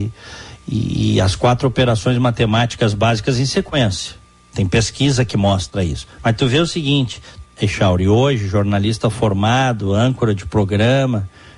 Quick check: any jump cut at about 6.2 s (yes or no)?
yes